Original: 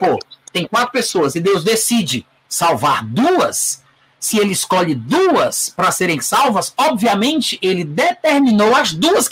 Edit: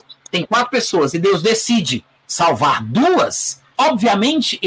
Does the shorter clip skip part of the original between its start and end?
yes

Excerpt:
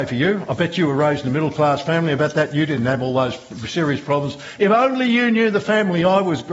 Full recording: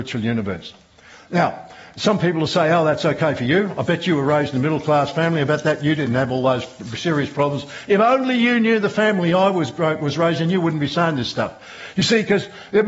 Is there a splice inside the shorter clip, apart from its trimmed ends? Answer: no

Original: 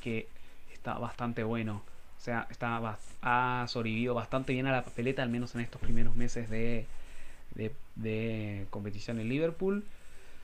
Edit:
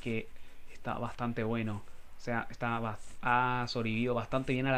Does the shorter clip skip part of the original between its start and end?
no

